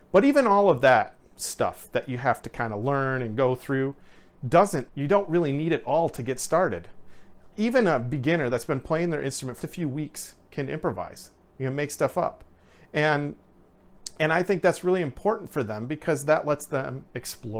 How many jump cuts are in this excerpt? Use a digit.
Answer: 3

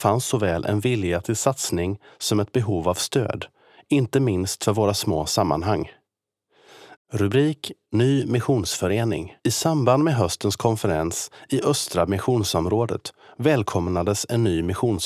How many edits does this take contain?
2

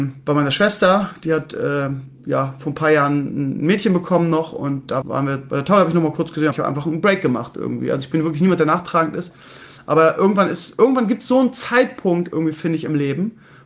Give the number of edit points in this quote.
2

